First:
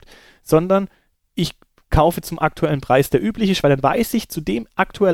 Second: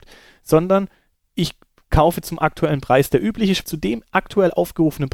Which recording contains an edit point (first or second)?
second